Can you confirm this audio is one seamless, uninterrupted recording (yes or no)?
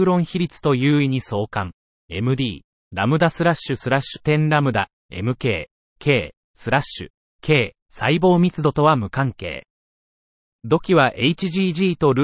yes